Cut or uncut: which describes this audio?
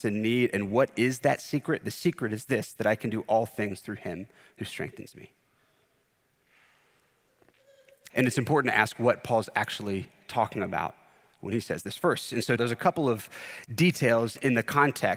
cut